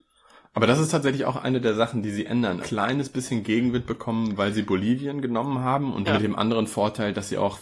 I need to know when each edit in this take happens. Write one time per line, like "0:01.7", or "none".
0:02.6
0:06.1